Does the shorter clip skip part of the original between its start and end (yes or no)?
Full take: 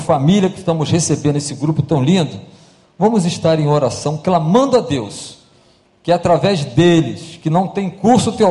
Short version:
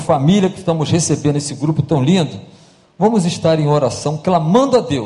no